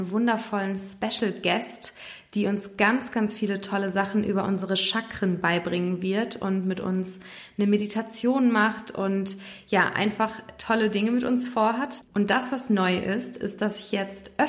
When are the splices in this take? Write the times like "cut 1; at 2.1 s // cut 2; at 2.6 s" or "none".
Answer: cut 1; at 12.0 s